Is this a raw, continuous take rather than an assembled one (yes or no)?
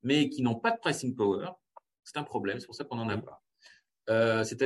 yes